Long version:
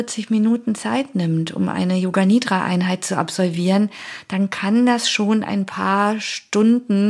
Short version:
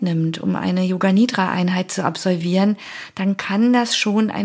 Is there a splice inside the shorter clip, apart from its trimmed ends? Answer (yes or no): no